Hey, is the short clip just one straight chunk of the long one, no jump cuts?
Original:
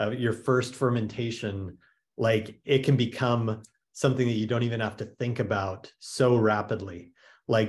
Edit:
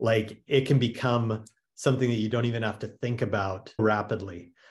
no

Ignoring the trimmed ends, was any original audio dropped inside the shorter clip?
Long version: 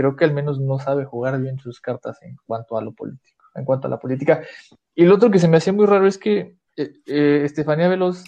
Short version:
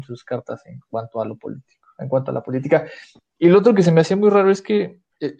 no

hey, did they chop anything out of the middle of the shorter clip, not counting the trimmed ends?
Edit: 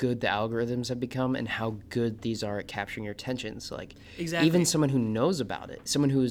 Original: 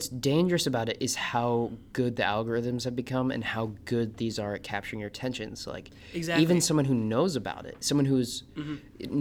no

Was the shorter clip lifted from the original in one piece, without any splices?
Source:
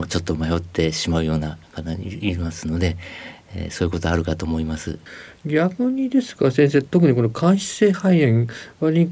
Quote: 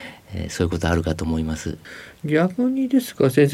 yes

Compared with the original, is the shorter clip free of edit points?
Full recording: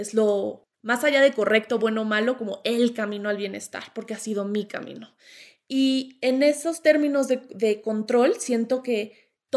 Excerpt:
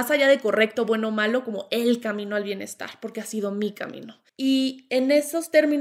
no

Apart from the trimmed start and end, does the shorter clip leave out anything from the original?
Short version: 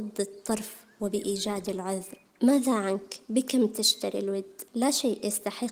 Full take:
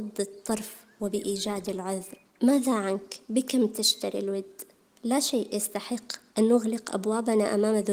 yes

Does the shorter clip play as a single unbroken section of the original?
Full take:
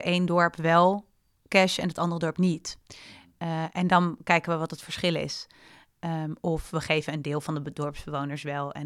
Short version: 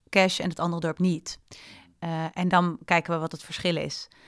yes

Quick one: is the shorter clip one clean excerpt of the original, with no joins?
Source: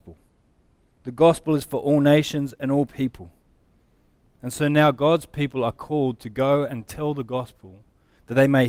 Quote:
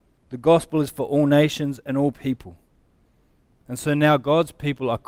yes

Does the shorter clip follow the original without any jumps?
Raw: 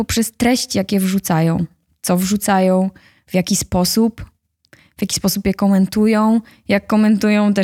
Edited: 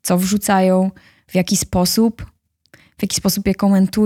yes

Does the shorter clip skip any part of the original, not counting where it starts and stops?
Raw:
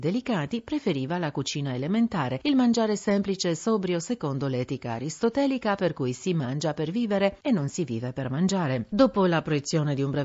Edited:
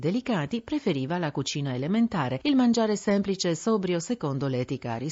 no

